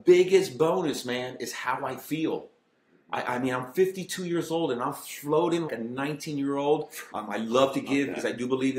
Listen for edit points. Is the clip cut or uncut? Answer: cut